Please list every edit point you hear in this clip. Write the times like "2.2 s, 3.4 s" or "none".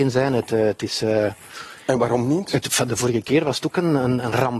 none